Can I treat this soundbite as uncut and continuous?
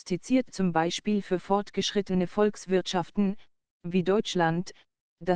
yes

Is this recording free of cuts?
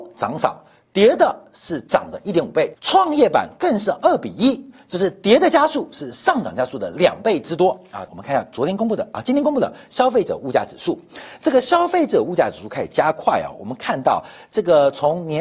no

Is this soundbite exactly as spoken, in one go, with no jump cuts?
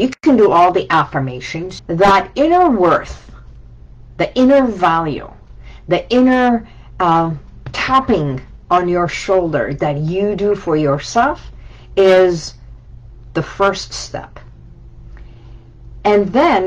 no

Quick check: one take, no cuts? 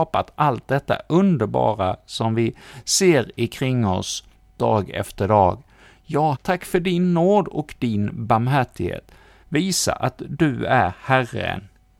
no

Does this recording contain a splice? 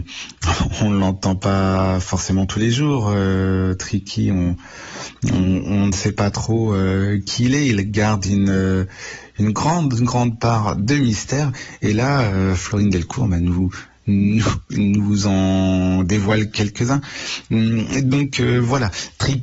no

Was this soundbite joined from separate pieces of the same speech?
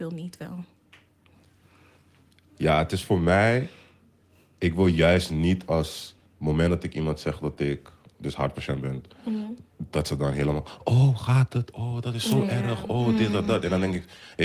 no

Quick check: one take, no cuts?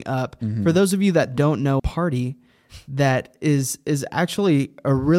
no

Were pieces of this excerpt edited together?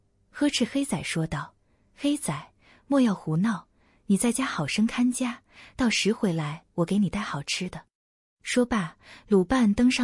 no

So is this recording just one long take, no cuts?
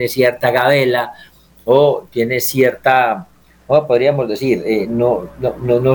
yes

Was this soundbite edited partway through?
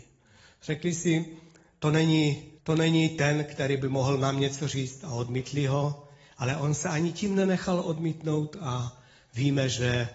yes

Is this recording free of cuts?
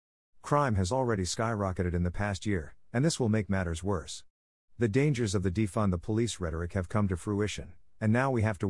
yes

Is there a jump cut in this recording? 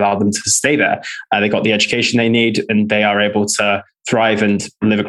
no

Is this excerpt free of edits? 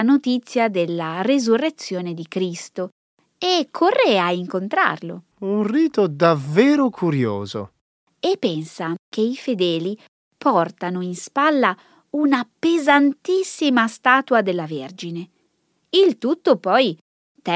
no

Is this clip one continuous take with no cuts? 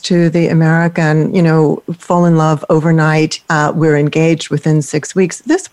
no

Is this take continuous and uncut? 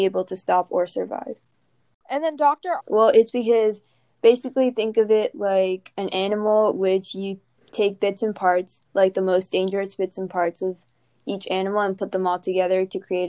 no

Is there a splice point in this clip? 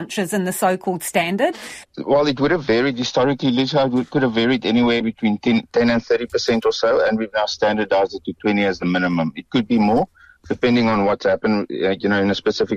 yes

